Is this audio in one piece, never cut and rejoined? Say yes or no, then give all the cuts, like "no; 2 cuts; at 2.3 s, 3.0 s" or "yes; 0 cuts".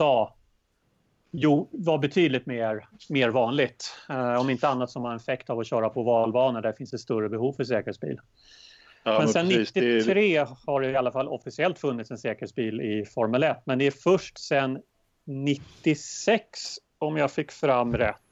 yes; 0 cuts